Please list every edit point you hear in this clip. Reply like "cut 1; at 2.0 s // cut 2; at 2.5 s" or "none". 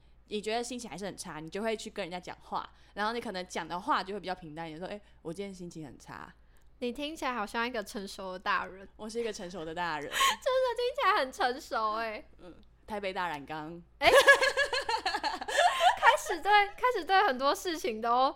cut 1; at 2.2 s